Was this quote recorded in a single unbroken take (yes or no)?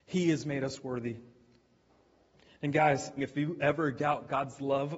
no